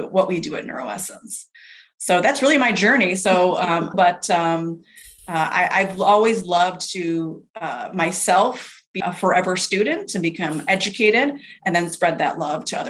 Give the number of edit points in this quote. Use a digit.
3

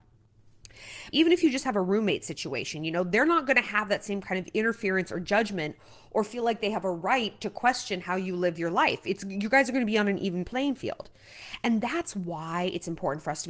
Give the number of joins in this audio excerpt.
1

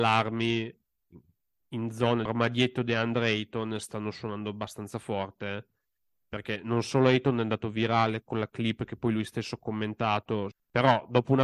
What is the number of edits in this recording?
2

